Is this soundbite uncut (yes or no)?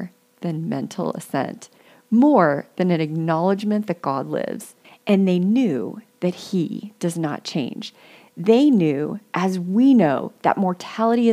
no